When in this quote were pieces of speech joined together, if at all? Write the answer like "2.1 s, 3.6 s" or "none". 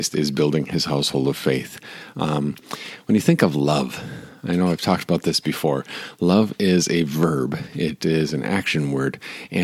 2.1 s